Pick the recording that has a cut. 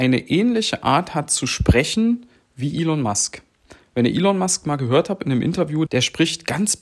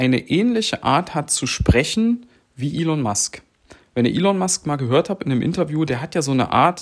first; 1 cut; at 5.9 s

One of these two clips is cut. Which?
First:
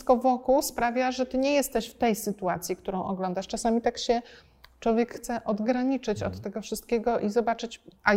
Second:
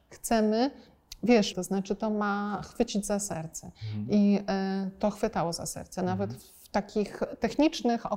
second; 1 cut; at 1.5 s

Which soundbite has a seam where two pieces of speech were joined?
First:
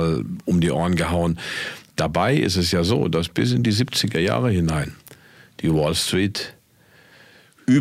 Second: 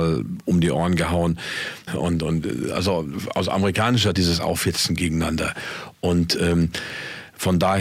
second; 2 cuts; at 1.9 s, 4.1 s

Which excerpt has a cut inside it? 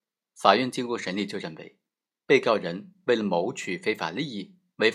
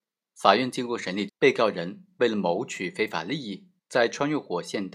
second; 2 cuts; at 1.3 s, 3.8 s

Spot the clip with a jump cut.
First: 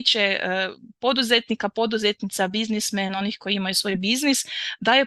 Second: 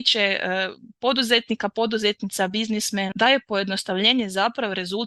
second; 1 cut; at 3.1 s

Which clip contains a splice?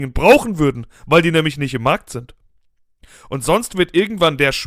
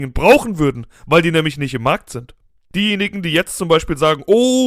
second; 1 cut; at 2.7 s

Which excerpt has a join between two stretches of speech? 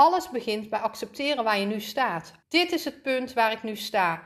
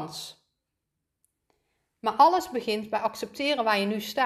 first; 1 cut; at 2.4 s

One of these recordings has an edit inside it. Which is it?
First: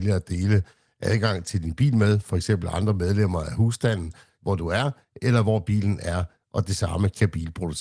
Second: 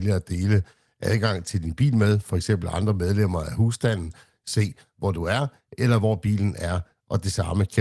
first; 1 cut; at 4.3 s

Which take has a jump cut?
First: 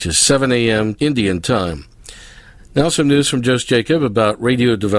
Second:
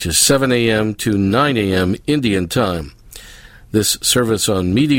first; 2 cuts; at 1.0 s, 2.6 s

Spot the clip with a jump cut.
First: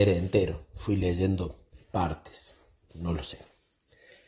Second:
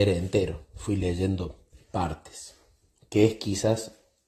first; 1 cut; at 2.9 s

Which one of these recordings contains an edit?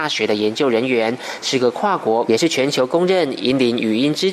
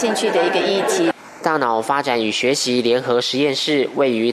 first; 1 cut; at 2.3 s

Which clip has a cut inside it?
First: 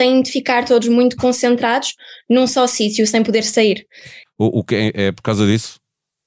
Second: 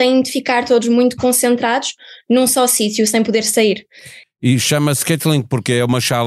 first; 1 cut; at 4.3 s

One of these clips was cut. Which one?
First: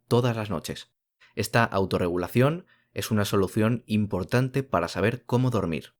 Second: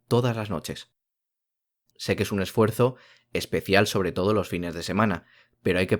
first; 1 cut; at 1.2 s

